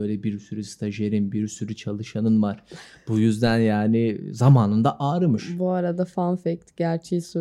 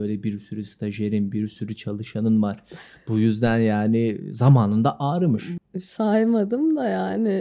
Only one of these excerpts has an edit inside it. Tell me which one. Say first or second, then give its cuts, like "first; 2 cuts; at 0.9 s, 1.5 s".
second; 1 cut; at 5.6 s